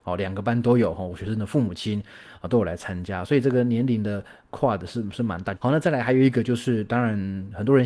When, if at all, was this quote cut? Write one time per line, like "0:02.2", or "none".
0:05.6